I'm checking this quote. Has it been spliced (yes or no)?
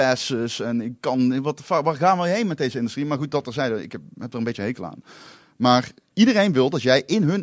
no